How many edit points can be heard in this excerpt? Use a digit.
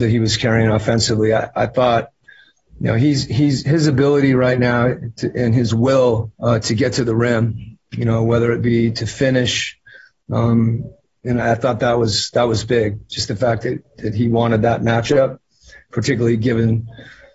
2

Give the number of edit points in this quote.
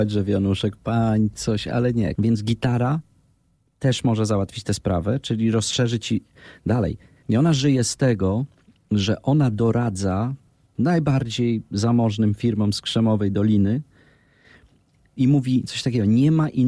2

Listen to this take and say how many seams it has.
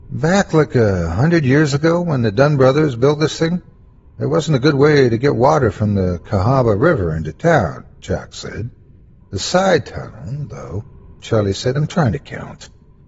2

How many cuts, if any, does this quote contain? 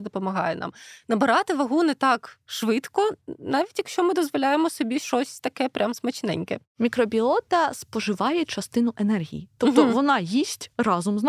0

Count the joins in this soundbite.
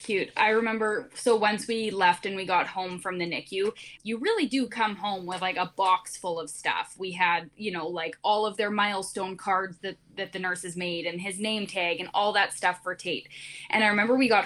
1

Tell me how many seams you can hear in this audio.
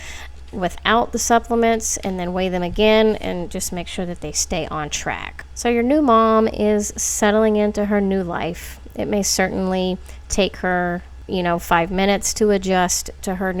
0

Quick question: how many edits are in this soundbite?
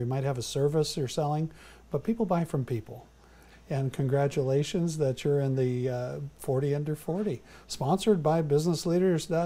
1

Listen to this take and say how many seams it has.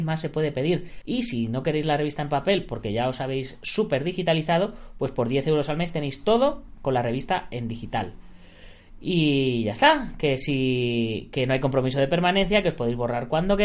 1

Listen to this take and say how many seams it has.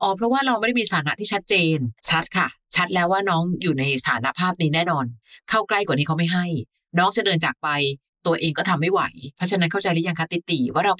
1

